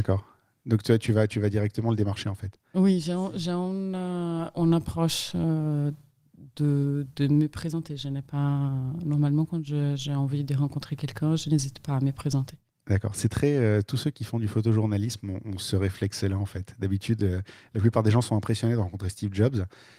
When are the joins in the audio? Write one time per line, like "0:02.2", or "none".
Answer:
none